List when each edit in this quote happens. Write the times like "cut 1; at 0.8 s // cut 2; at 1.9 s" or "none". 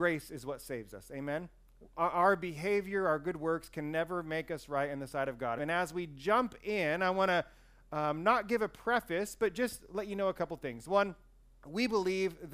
cut 1; at 5.6 s